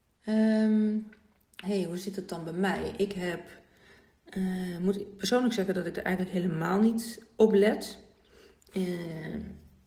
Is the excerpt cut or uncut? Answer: cut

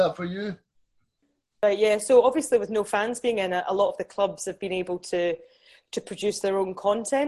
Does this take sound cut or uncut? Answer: uncut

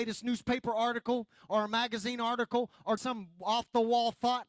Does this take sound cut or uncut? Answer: cut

